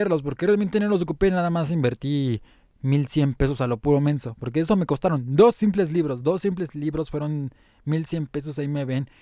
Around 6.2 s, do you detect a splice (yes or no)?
no